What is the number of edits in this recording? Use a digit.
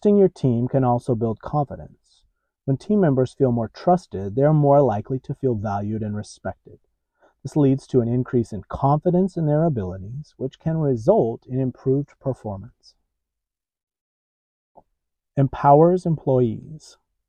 0